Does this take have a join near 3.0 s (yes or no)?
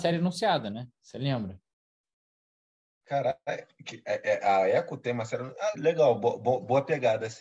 no